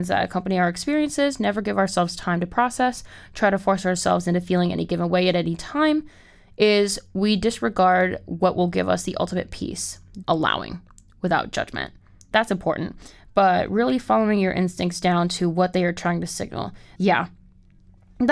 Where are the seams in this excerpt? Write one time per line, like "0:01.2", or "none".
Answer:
0:10.2
0:12.3
0:17.0